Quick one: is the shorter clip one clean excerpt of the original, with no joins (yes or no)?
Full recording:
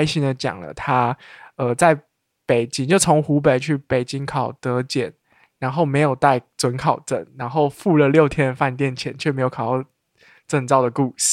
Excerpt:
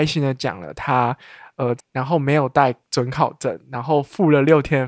no